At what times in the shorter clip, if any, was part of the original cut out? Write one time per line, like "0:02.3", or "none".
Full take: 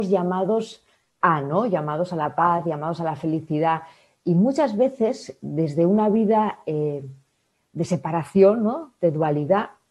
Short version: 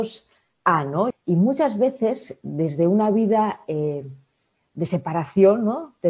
0:01.1

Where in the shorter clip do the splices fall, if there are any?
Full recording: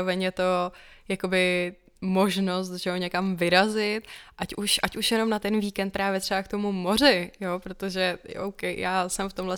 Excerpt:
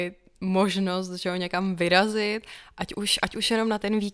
none

